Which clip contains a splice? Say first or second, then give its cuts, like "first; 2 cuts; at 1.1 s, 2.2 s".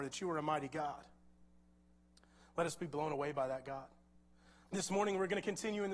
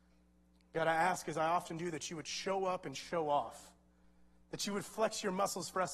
first; 1 cut; at 4.7 s